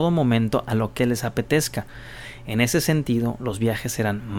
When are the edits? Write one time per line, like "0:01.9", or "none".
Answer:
0:01.0